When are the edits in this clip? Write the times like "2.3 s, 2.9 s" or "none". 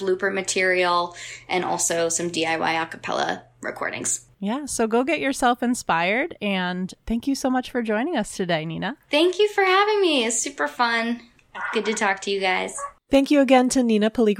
none